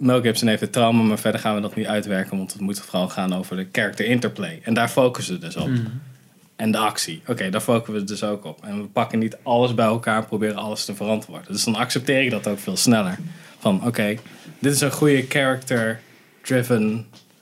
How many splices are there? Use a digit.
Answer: 0